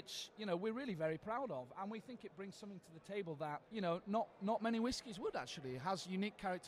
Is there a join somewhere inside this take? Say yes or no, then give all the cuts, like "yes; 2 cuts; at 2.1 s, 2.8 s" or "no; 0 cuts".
no; 0 cuts